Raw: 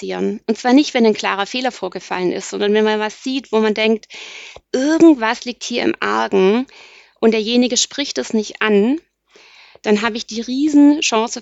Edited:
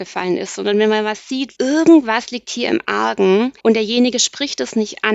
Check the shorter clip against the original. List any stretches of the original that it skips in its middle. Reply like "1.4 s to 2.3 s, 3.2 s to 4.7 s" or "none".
3.5 s to 4.7 s, 6.7 s to 7.2 s